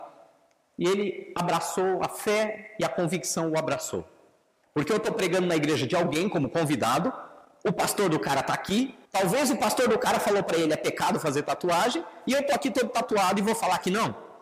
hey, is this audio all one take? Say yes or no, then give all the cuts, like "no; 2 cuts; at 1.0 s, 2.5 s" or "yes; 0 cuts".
no; 2 cuts; at 4.6 s, 9.1 s